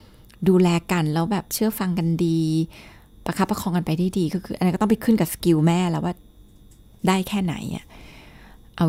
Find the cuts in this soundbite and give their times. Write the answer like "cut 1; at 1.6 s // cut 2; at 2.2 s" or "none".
none